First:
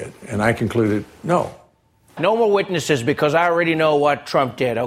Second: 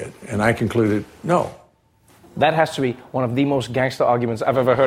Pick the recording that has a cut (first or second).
first